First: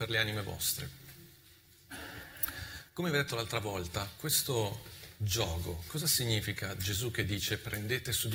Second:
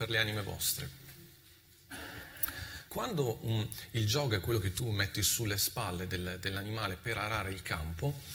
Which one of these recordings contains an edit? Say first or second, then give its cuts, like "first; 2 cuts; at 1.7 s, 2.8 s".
second; 1 cut; at 2.9 s